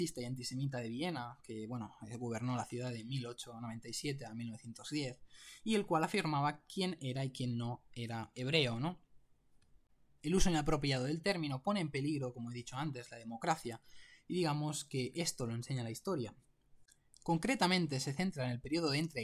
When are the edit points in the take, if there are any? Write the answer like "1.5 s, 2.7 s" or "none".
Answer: 10.1 s